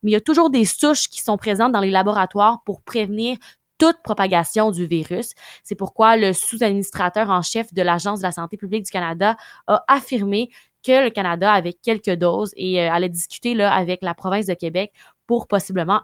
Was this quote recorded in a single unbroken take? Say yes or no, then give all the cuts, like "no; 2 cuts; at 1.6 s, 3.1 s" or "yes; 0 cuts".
yes; 0 cuts